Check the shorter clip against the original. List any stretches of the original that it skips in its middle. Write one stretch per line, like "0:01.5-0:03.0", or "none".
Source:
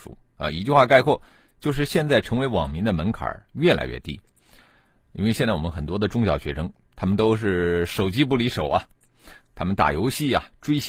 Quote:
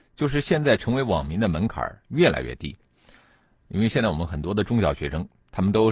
none